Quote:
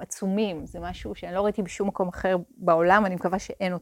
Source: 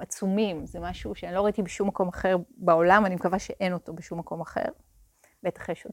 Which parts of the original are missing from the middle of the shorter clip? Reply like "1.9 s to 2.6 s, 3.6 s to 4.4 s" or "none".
none

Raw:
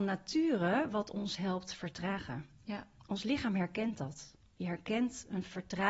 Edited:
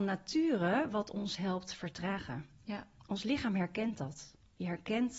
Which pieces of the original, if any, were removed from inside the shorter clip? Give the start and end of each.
none

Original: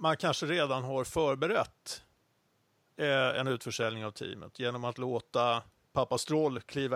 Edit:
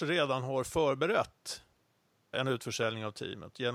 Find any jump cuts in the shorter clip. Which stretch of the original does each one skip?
2.7 s to 3.3 s

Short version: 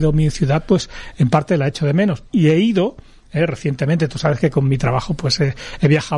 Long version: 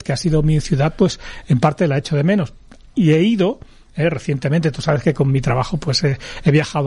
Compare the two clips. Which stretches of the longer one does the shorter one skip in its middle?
2.6 s to 2.9 s

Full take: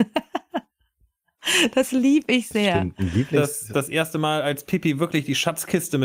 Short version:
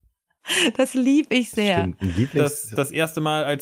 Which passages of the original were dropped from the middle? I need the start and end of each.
none

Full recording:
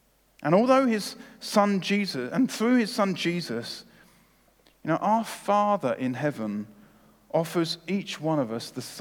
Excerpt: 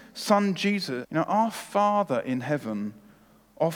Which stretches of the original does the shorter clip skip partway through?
2.3 s to 4.8 s

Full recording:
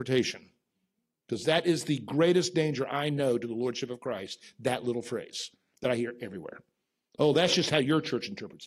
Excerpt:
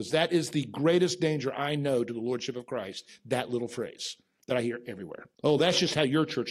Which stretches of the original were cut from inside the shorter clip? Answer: 6.7 s to 7.1 s

